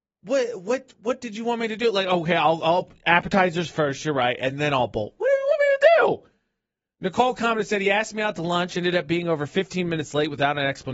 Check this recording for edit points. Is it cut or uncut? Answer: uncut